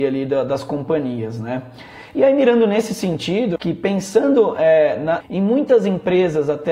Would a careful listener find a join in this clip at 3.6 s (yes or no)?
yes